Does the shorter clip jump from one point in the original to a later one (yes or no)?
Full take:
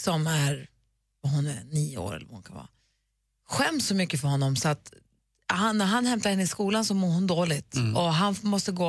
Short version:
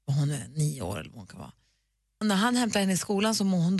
yes